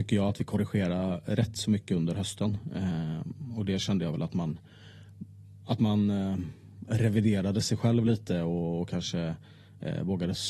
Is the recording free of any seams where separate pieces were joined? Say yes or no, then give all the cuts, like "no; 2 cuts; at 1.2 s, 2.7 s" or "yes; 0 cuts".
yes; 0 cuts